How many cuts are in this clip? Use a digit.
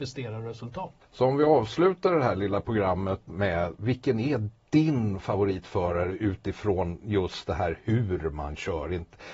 1